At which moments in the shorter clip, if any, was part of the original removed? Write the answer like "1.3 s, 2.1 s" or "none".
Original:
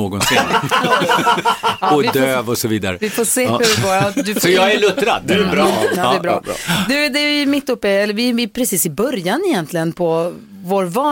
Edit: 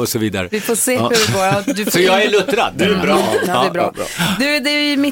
none